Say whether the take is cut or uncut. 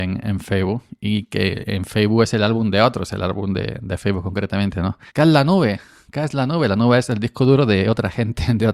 cut